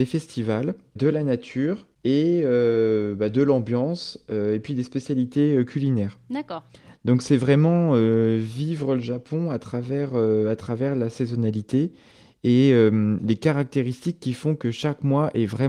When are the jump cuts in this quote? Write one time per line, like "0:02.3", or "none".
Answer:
none